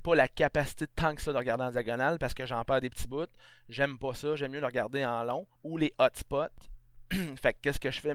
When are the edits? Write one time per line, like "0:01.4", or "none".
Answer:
0:05.6